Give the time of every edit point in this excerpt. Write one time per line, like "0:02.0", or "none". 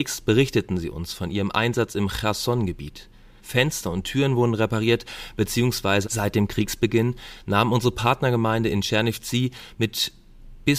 0:03.4
0:06.0